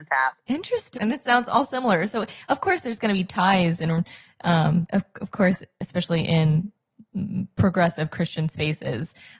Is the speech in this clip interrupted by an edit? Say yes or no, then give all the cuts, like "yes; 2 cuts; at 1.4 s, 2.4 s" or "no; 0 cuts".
yes; 2 cuts; at 0.9 s, 4.9 s